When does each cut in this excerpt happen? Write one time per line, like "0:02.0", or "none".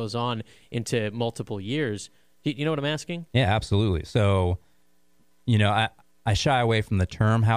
none